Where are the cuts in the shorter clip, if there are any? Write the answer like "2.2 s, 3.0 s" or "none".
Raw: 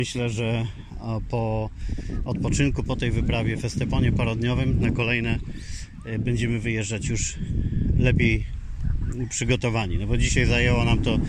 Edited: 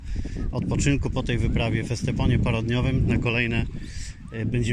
none